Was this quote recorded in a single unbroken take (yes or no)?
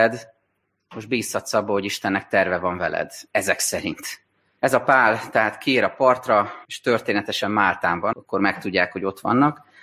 no